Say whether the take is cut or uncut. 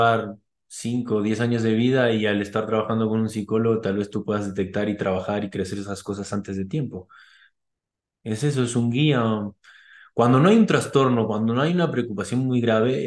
uncut